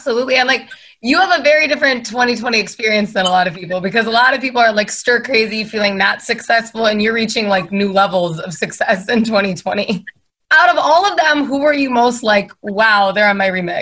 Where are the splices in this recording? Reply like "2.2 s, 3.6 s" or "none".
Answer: 10.4 s